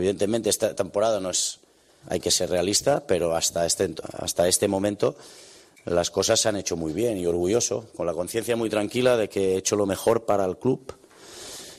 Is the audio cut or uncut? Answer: cut